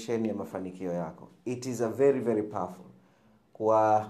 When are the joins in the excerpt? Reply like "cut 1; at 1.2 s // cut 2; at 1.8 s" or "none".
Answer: none